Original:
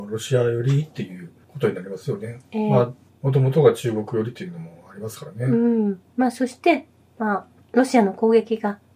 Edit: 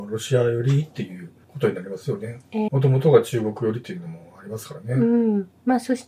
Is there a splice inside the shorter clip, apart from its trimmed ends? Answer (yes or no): yes